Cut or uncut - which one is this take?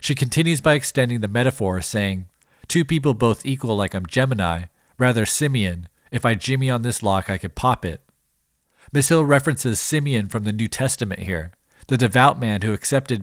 uncut